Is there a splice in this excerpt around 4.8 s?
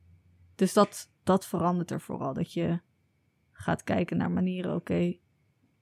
no; 0 cuts

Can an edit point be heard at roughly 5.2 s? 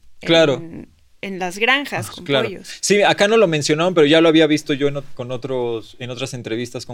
no; 1 cut; at 2.1 s

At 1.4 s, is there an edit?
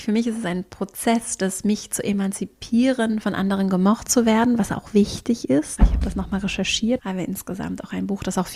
no; 2 cuts; at 5.8 s, 7.0 s

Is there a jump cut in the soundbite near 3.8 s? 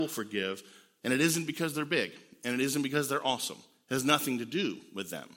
no; 1 cut; at 1.0 s

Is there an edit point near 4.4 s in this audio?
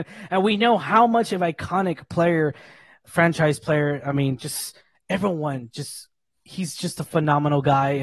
no; 0 cuts

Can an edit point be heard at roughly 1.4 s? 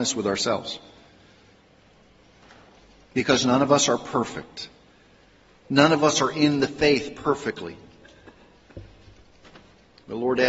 no; 0 cuts

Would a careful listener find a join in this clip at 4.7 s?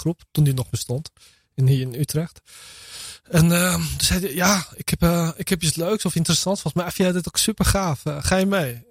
no; 0 cuts

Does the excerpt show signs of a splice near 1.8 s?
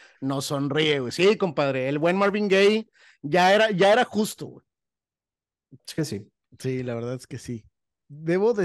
no; 1 cut; at 5.8 s

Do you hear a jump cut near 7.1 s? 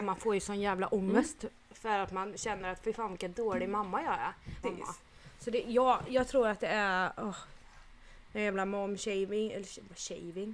no; 1 cut; at 4.6 s

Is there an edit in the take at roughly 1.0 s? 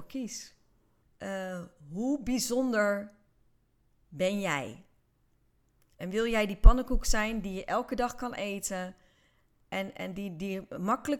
yes; 1 cut; at 1.0 s

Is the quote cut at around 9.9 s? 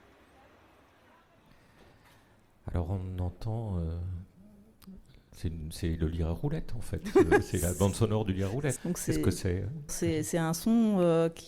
yes; 2 cuts; at 8.8 s, 9.9 s

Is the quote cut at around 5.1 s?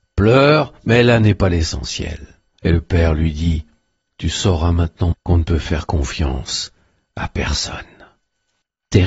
yes; 2 cuts; at 2.5 s, 5.1 s

